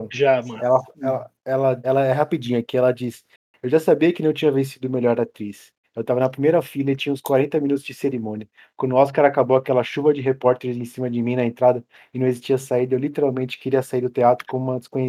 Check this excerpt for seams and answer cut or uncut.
cut